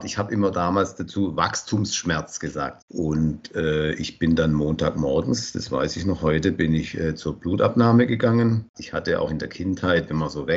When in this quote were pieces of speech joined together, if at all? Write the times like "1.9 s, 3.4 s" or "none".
2.8 s, 8.7 s